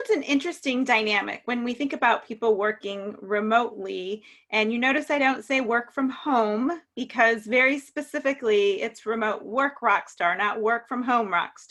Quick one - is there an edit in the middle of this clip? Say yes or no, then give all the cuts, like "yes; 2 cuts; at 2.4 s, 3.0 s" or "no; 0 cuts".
no; 0 cuts